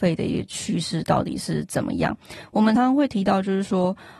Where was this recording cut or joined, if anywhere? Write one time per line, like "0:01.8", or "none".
0:02.8